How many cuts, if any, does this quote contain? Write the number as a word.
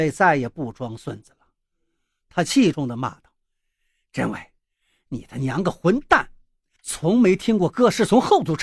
two